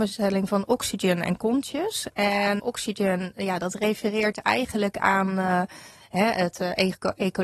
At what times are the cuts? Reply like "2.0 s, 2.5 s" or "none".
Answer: 2.6 s